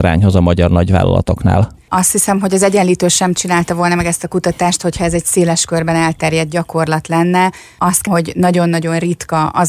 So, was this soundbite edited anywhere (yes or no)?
yes